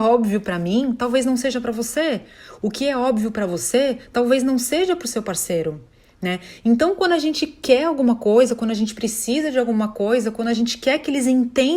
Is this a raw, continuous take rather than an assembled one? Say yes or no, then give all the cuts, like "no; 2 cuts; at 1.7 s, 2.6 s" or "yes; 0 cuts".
yes; 0 cuts